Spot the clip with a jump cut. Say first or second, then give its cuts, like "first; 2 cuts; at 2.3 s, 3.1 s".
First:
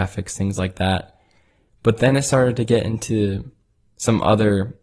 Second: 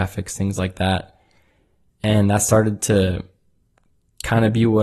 first; 1 cut; at 1.7 s